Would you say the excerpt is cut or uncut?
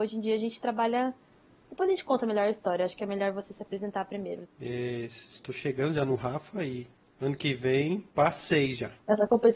cut